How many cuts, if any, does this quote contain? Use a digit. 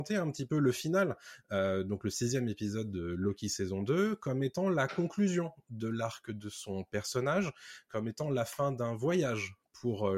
0